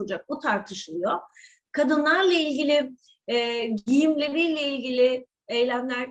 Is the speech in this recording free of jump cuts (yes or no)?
yes